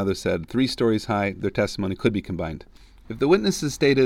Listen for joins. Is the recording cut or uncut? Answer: cut